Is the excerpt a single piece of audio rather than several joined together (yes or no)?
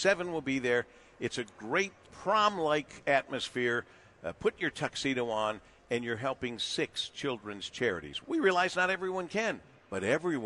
no